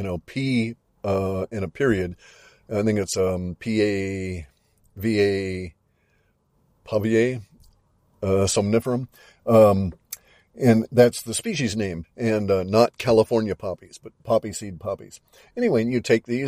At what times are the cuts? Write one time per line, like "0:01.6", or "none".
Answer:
0:12.0

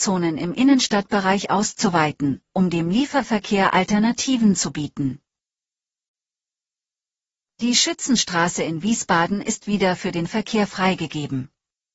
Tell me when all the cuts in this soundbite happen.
none

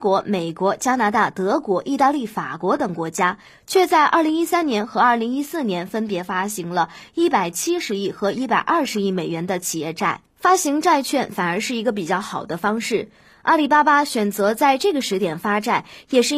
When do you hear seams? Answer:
0:10.3

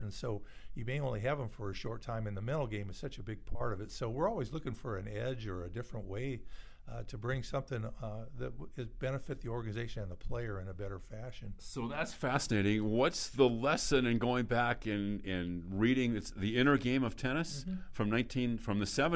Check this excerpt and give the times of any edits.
none

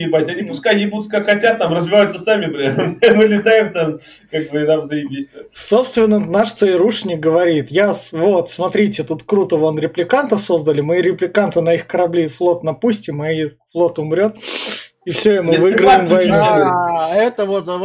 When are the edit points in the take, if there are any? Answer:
none

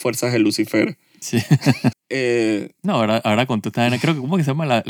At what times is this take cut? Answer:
0:01.9

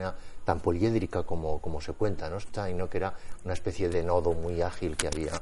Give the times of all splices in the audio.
0:02.4
0:03.9

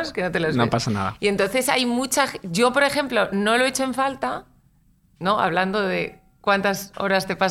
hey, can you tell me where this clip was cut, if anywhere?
none

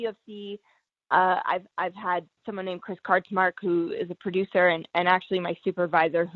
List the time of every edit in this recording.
none

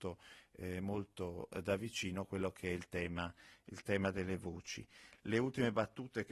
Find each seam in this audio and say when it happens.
none

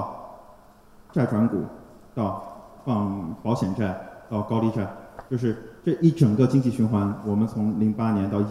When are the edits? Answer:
0:02.8

